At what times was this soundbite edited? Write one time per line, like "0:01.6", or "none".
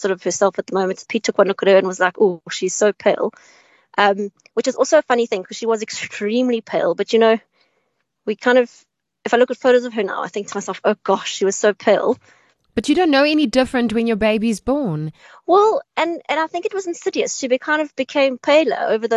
none